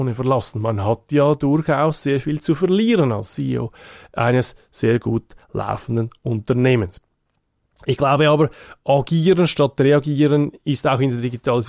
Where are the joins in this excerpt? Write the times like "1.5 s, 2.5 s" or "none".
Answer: none

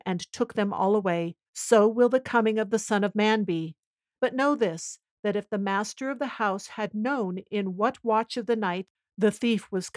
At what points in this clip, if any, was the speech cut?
1.5 s, 4.2 s

